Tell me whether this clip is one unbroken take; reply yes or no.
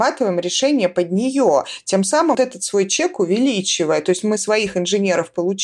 no